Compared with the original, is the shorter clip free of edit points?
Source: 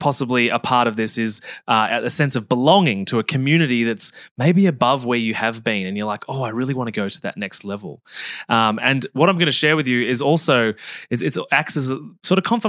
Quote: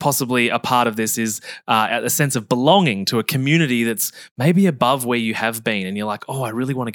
yes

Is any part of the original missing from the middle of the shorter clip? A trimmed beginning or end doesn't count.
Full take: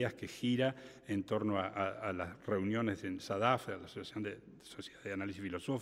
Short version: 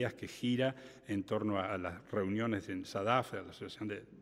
yes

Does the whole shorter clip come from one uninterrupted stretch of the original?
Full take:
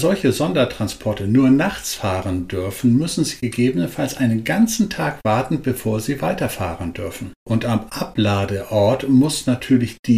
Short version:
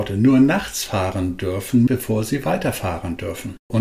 no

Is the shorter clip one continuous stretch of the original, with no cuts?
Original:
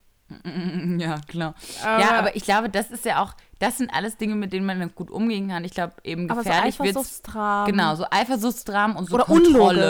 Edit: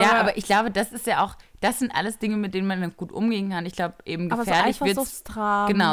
yes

